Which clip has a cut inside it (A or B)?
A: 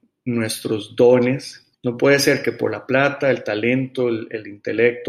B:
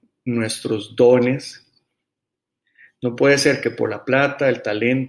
A